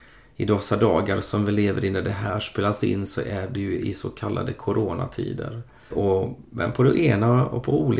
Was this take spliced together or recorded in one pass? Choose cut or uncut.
cut